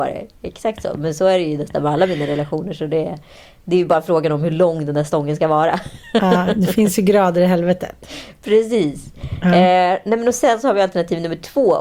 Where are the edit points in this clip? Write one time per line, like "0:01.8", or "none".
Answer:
none